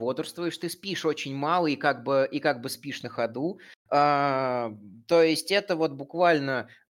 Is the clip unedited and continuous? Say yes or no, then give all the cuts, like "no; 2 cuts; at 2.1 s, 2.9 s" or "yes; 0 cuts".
yes; 0 cuts